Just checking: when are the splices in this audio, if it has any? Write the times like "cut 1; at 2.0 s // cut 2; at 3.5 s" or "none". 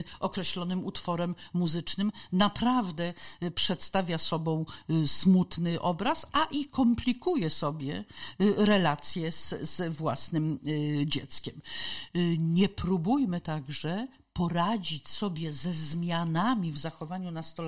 none